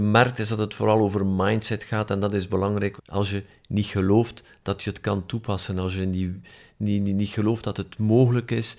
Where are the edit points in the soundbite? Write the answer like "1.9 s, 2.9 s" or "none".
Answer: 3.0 s